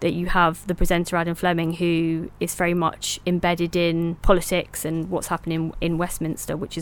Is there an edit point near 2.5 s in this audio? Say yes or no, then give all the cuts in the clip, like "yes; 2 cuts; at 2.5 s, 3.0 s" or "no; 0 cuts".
no; 1 cut; at 4.2 s